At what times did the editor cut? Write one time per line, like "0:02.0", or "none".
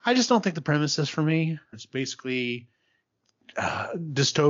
0:01.7